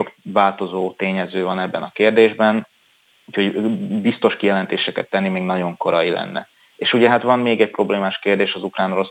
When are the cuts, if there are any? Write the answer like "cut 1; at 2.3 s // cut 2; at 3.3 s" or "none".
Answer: none